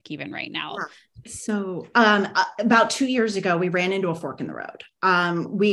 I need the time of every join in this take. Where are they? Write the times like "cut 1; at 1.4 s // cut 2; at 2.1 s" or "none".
none